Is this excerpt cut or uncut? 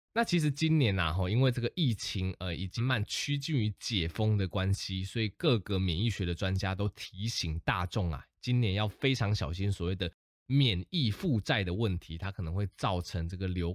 cut